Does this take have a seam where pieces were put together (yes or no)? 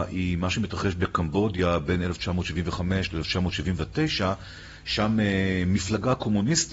no